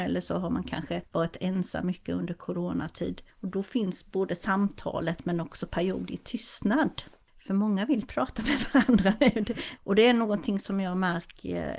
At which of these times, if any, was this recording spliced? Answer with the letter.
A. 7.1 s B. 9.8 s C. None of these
B